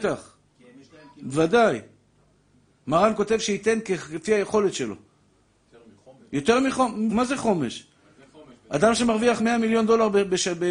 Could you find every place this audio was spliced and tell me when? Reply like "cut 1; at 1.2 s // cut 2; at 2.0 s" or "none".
cut 1; at 7.1 s // cut 2; at 9.4 s